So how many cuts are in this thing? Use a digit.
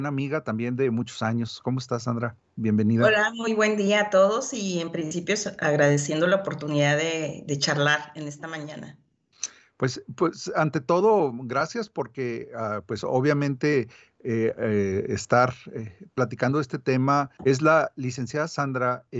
1